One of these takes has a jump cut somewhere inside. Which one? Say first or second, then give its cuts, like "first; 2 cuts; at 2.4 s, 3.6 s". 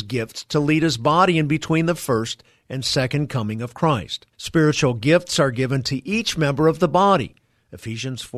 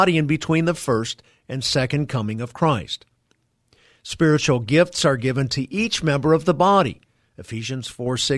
first; 1 cut; at 4.3 s